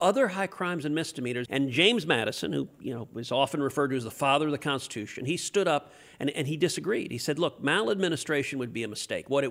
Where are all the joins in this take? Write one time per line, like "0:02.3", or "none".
0:01.5